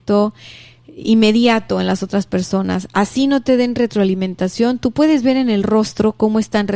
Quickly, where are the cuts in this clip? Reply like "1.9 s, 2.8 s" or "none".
none

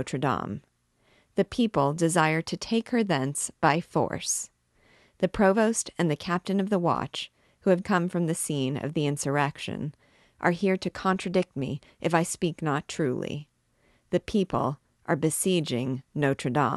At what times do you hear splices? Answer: 7.8 s

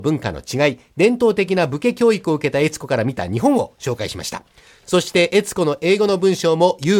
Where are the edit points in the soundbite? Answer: none

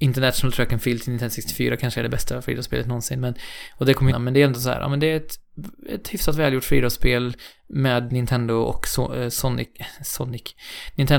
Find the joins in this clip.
4.1 s

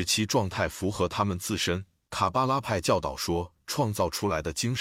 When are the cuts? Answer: 2.1 s

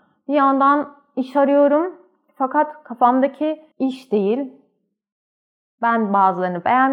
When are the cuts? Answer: 3.7 s

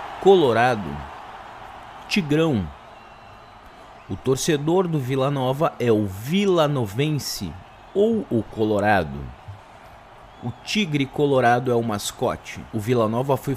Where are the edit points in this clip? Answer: none

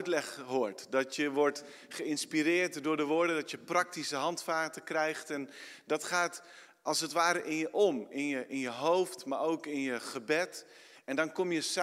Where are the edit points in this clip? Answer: none

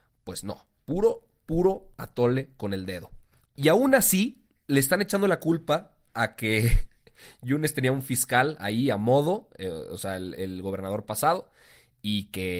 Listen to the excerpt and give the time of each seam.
3.4 s, 10.3 s

